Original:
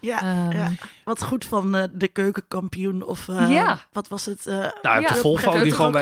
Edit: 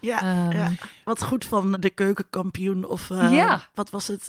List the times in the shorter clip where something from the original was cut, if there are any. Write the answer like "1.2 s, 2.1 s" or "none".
1.7 s